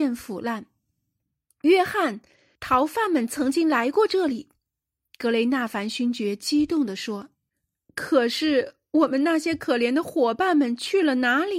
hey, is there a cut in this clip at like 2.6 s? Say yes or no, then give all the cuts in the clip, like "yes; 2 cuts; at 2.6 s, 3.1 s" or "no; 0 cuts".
yes; 1 cut; at 2.6 s